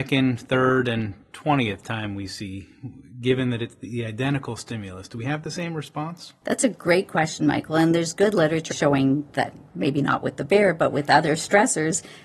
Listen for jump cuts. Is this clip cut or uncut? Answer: cut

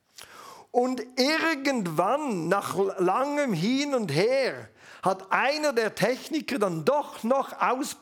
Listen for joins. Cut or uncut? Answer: uncut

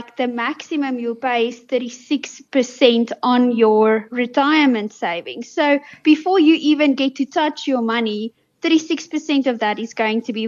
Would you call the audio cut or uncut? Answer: uncut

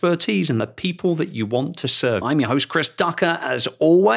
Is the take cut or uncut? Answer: cut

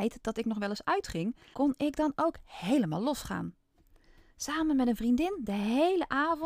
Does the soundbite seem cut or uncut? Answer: cut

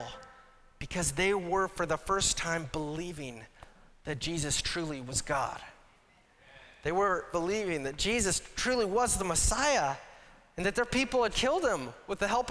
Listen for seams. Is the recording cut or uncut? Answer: cut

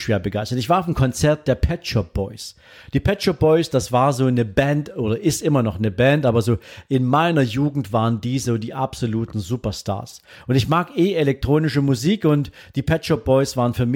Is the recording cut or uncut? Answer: uncut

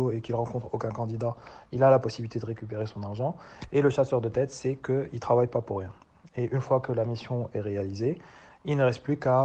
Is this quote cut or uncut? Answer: uncut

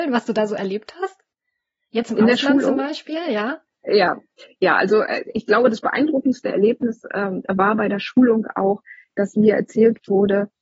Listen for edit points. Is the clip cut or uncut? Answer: uncut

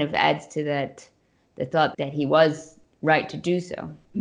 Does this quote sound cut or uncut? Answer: cut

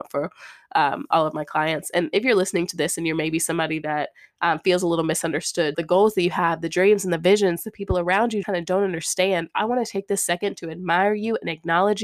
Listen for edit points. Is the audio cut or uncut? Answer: cut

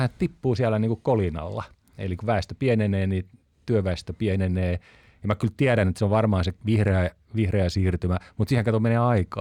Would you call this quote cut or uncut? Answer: cut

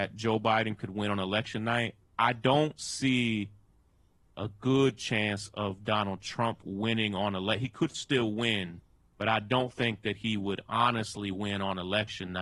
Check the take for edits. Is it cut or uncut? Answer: uncut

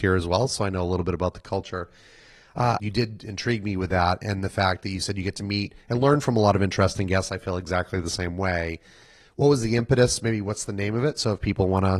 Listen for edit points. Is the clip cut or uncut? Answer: cut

